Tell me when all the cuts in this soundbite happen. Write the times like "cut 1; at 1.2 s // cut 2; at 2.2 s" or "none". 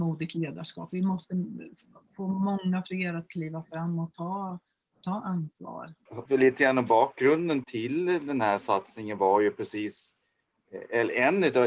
cut 1; at 6.3 s // cut 2; at 7.6 s